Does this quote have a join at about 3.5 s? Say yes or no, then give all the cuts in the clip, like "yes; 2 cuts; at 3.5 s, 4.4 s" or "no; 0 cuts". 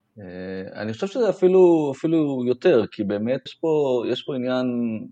yes; 1 cut; at 3.5 s